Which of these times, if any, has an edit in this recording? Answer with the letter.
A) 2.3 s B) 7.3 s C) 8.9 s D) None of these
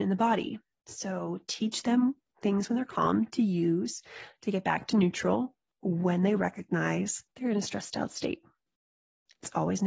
B